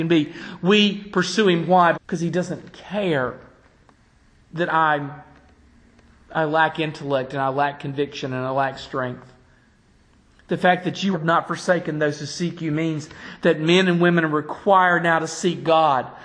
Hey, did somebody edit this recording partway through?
yes; 2 cuts; at 1.9 s, 11.1 s

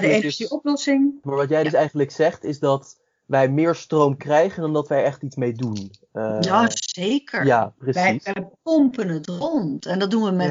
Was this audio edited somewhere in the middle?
no; 0 cuts

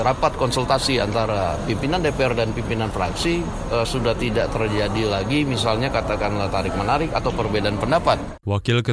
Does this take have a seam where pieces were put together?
no; 0 cuts

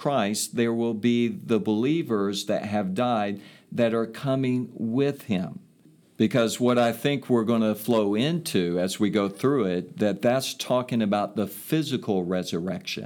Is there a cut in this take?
yes; 1 cut; at 6.0 s

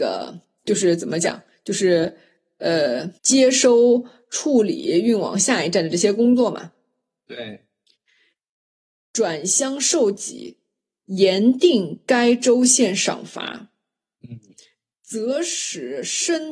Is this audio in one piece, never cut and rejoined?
no; 1 cut; at 3.2 s

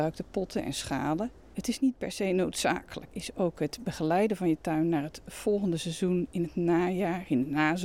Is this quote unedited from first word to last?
no; 2 cuts; at 1.5 s, 3.1 s

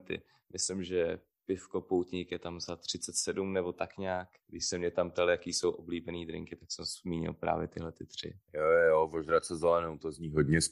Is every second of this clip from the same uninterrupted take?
no; 2 cuts; at 4.4 s, 8.4 s

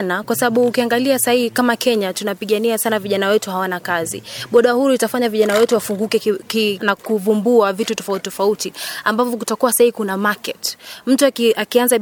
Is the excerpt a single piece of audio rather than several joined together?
no; 1 cut; at 6.8 s

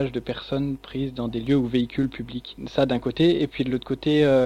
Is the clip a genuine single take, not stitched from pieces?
yes; 0 cuts

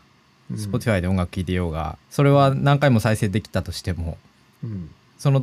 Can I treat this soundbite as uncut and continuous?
no; 1 cut; at 2.0 s

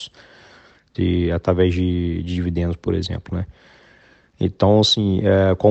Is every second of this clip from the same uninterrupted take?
yes; 0 cuts

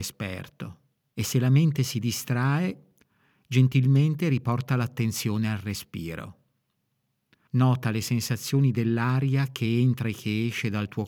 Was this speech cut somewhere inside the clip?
yes; 2 cuts; at 1.1 s, 7.5 s

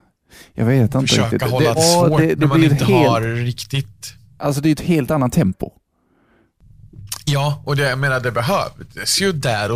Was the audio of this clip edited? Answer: yes; 1 cut; at 1.8 s

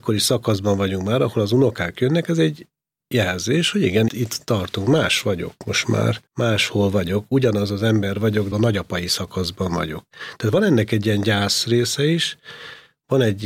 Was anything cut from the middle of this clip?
yes; 3 cuts; at 4.1 s, 6.3 s, 8.5 s

